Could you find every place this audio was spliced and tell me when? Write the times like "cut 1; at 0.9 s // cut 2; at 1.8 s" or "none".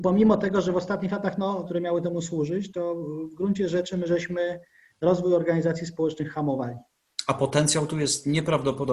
cut 1; at 1.7 s